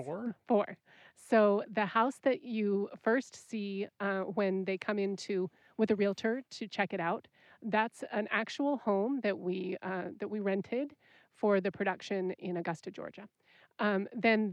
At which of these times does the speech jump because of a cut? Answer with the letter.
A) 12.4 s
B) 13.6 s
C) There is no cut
A